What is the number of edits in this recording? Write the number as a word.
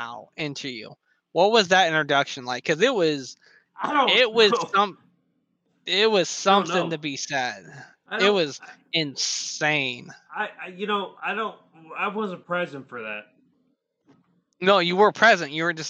zero